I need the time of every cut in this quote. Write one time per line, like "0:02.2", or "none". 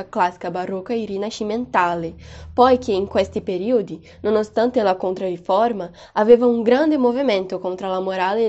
none